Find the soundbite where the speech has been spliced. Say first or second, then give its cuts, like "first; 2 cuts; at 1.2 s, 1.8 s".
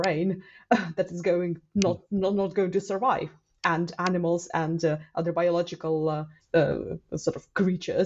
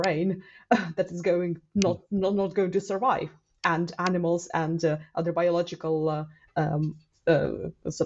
first; 1 cut; at 6.4 s